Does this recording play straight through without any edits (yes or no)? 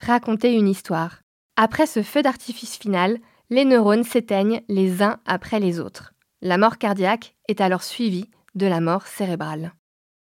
no